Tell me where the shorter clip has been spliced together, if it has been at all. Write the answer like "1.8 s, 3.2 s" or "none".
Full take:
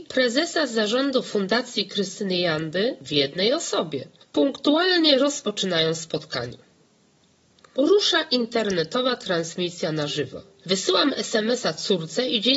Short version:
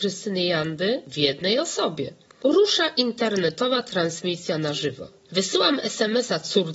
2.3 s